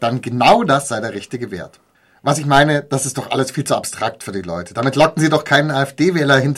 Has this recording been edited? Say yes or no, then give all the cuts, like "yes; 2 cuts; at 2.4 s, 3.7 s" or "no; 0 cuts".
no; 0 cuts